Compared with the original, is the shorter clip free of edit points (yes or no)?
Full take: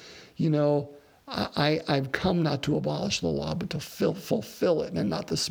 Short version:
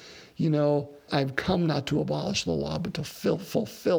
no